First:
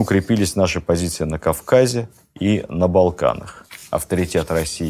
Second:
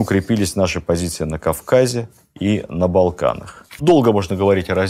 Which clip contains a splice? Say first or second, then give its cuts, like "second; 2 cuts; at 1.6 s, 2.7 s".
second; 1 cut; at 3.8 s